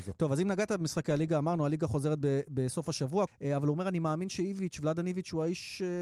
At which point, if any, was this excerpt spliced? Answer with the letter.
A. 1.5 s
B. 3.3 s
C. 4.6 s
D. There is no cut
B